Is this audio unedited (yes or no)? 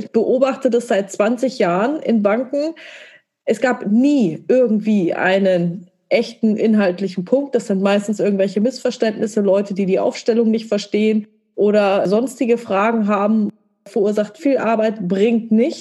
no